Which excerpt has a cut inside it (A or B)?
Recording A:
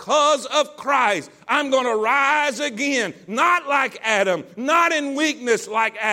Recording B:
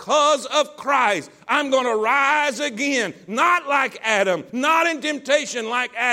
B